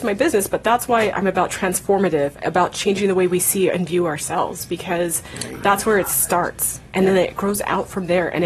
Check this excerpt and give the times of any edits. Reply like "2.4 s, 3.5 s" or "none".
none

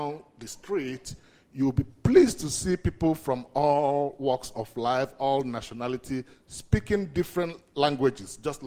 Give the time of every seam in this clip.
none

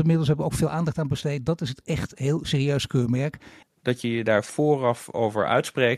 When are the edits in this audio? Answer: 3.6 s

